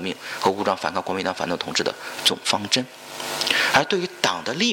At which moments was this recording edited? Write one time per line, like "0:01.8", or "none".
none